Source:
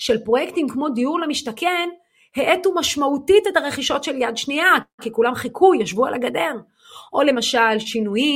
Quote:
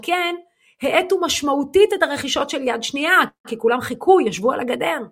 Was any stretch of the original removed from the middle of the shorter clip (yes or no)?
no